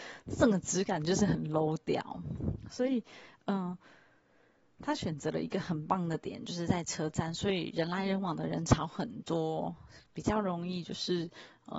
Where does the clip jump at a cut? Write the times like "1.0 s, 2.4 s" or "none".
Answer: none